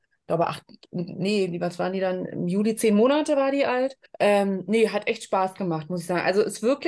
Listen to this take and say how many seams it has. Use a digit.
1